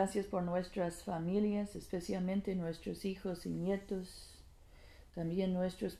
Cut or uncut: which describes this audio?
uncut